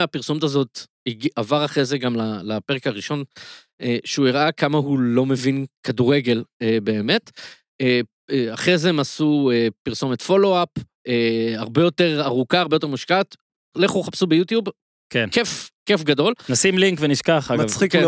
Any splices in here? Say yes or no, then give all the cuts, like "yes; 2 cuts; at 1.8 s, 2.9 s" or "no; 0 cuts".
no; 0 cuts